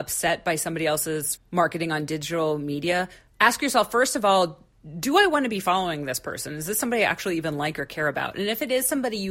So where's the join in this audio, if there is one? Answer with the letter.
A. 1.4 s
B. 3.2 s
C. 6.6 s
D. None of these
A